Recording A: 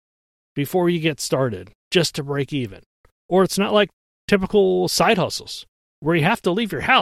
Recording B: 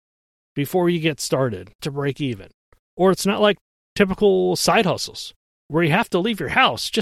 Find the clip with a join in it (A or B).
B